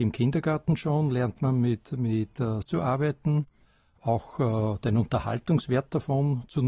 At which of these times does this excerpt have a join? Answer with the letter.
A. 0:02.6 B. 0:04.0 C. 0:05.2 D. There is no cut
A